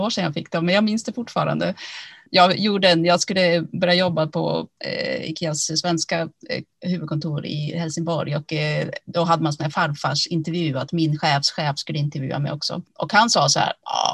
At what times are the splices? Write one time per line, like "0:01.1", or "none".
none